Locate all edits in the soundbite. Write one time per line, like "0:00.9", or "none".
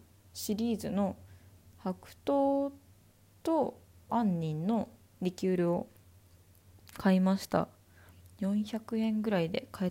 0:04.1